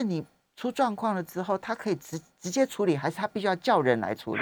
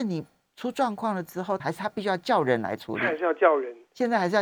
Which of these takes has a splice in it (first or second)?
second